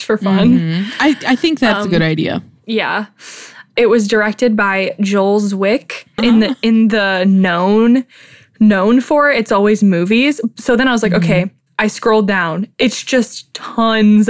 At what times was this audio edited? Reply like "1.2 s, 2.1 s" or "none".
6.2 s